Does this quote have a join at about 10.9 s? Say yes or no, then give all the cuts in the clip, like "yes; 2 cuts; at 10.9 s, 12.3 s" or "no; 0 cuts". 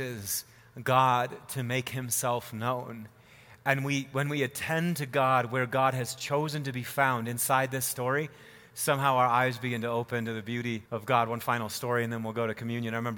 yes; 1 cut; at 10.9 s